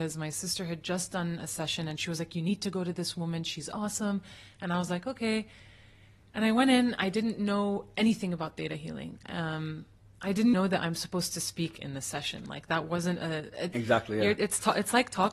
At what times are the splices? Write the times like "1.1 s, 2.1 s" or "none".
10.5 s, 13.7 s